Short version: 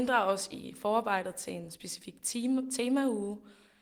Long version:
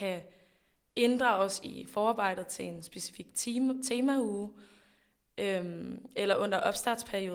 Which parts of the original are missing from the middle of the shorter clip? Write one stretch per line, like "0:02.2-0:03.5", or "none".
none